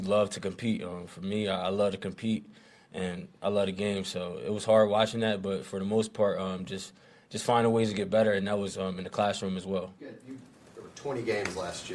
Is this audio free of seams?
no; 1 cut; at 10.0 s

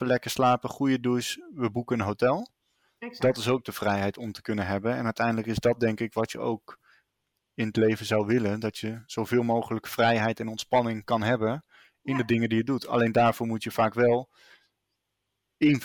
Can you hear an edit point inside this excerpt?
no; 0 cuts

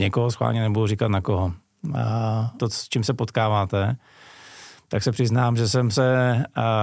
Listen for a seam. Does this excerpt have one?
yes; 1 cut; at 2.6 s

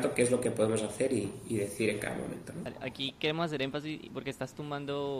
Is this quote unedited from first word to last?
yes; 0 cuts

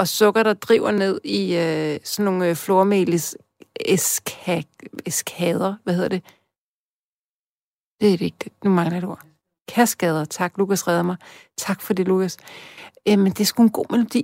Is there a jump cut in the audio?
no; 0 cuts

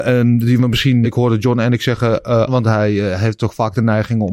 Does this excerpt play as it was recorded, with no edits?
no; 2 cuts; at 1.0 s, 2.5 s

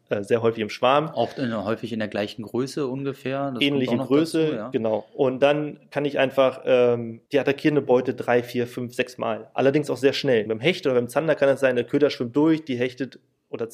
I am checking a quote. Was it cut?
yes; 2 cuts; at 7.3 s, 10.5 s

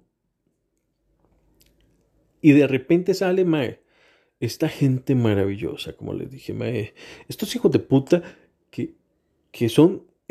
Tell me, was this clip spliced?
no; 0 cuts

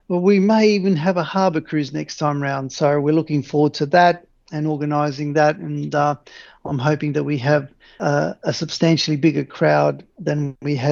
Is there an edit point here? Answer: no; 0 cuts

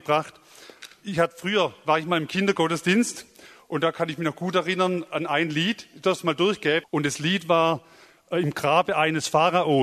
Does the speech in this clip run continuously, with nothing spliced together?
no; 1 cut; at 6.8 s

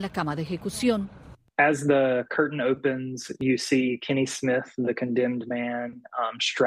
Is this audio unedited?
yes; 0 cuts

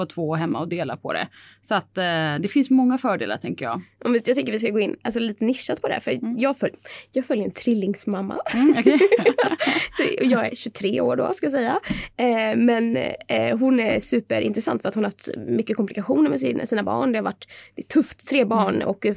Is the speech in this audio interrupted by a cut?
no; 0 cuts

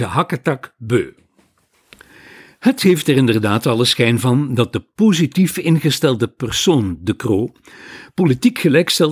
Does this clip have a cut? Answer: no; 0 cuts

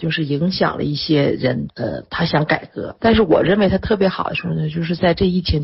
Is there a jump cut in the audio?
yes; 2 cuts; at 1.7 s, 3.0 s

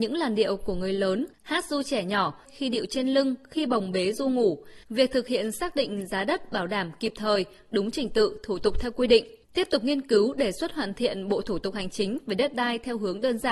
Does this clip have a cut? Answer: yes; 2 cuts; at 2.5 s, 4.8 s

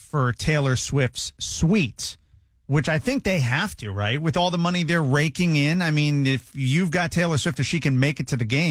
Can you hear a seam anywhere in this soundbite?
no; 0 cuts

